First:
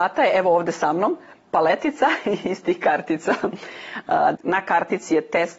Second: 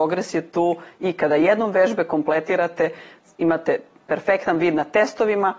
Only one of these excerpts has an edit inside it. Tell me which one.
first; 1 cut; at 4.3 s

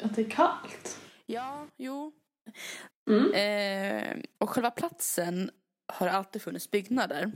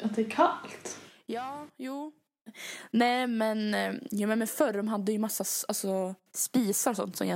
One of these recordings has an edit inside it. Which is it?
first; 2 cuts; at 2.9 s, 4.3 s

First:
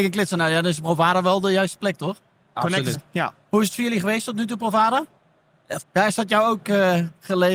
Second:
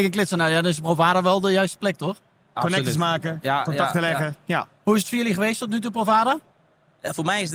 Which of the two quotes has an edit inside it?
first; 2 cuts; at 2.9 s, 5.8 s

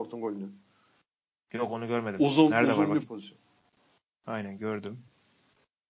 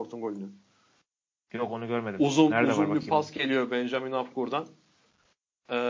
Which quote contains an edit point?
first; 1 cut; at 3.0 s

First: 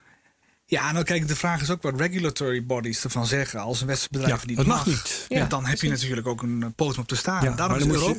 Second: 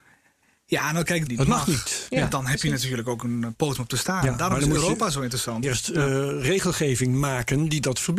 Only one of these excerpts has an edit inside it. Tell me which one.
second; 2 cuts; at 1.3 s, 5.6 s

